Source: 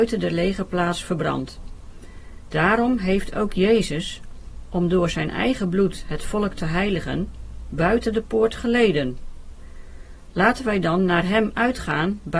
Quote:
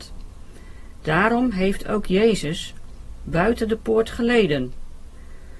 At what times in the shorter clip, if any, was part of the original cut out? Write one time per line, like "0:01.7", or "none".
0:03.2